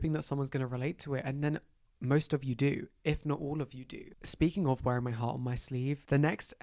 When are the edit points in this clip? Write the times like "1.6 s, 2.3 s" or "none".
none